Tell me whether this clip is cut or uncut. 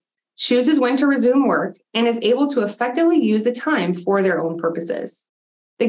uncut